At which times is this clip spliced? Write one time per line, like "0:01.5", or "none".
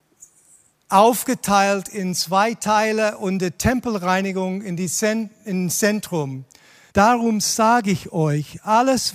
0:06.9